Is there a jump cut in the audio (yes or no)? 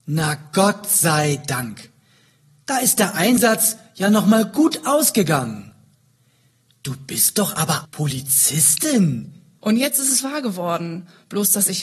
yes